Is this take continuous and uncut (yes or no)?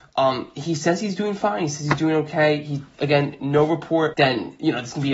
no